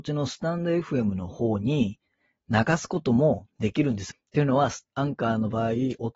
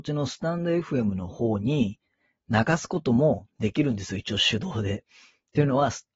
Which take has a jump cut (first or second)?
first